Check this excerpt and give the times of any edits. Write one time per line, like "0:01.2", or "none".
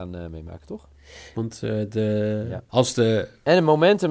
0:01.3
0:02.7